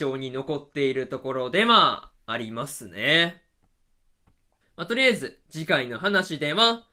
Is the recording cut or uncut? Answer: cut